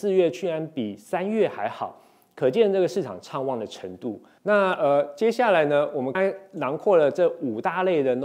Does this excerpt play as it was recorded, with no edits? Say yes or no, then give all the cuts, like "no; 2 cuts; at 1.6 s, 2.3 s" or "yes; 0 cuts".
no; 2 cuts; at 4.4 s, 6.1 s